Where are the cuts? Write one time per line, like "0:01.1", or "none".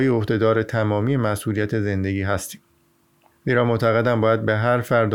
0:03.3

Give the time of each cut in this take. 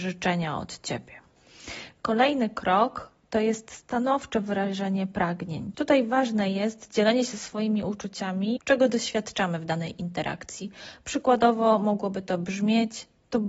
0:05.7
0:08.6

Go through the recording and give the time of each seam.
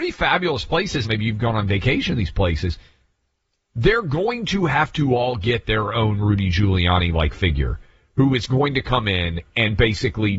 0:01.0

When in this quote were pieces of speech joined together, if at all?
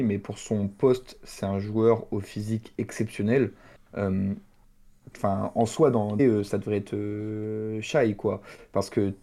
0:06.2

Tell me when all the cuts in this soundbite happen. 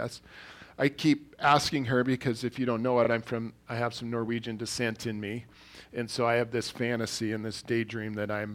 none

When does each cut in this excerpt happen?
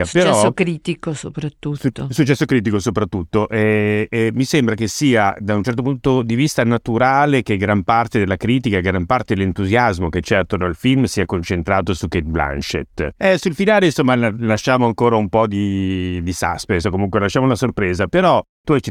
0:04.1
0:13.1

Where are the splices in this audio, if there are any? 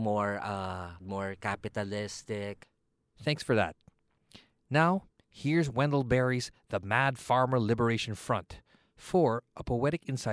0:01.0

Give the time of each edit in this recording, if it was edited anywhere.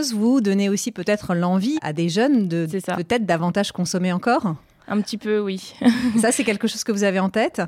0:01.8

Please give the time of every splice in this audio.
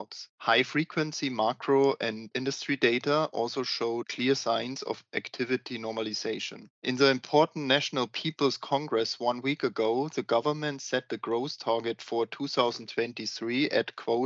none

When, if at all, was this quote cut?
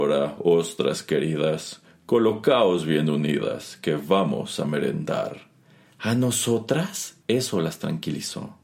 0:07.2

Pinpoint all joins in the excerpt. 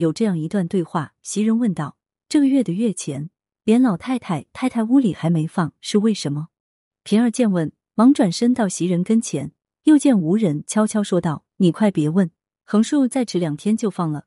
none

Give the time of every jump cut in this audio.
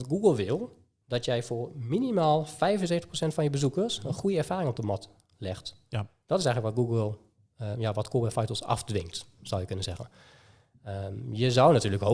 none

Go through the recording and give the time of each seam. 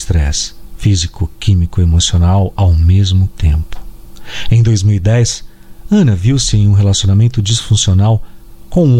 none

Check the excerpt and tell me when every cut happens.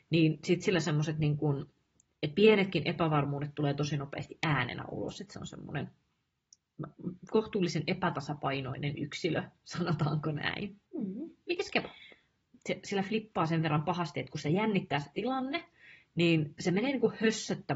0:10.9
0:12.5

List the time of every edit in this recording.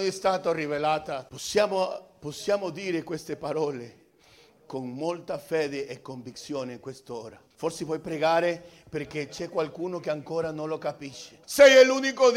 0:01.3
0:07.5
0:11.4

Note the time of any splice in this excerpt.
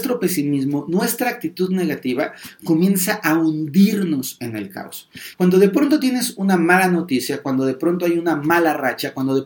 0:05.3

